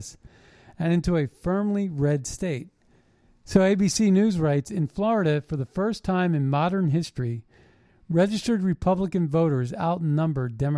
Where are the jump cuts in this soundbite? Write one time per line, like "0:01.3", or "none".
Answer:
0:03.3